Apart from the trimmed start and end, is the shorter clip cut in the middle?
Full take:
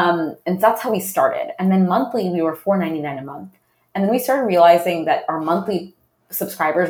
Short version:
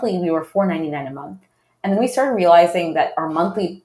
no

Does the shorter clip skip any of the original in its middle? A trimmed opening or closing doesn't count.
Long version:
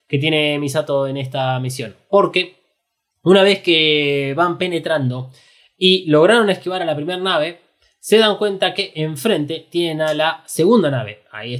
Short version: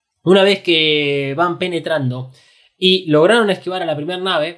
no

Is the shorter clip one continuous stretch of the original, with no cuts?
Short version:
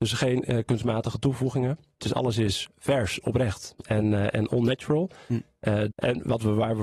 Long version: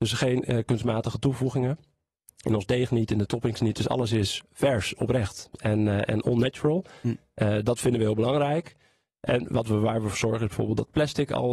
no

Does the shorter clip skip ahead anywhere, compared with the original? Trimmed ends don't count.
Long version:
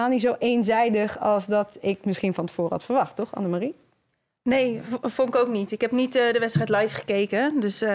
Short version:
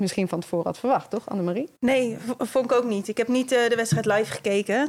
yes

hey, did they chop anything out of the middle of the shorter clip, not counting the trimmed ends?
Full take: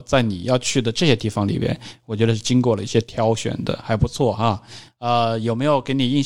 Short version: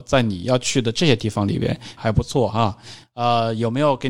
yes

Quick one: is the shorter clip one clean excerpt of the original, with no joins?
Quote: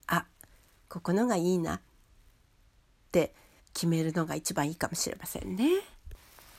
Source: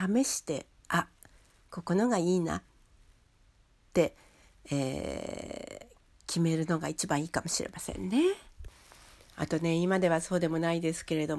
no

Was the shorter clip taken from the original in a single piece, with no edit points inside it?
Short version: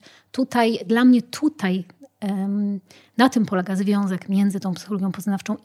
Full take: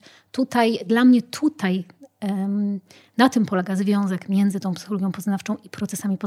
yes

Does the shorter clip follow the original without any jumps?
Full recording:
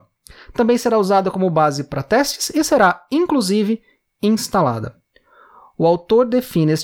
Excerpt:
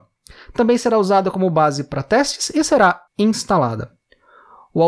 no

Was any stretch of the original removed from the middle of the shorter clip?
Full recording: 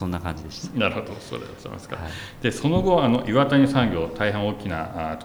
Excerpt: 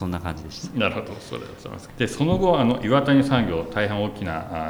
yes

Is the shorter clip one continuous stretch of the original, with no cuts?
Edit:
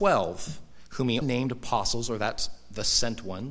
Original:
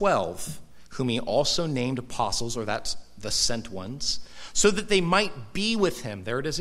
no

